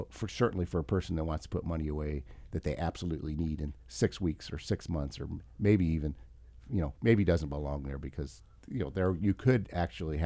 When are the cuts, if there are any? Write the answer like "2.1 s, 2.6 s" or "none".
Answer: 7.0 s